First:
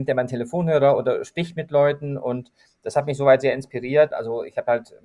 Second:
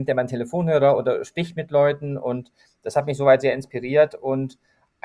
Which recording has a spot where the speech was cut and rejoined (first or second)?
first